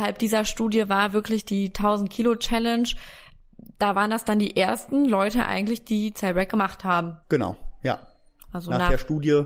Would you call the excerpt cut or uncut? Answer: cut